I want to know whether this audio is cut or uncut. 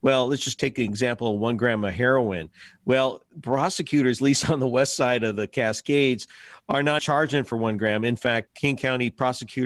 cut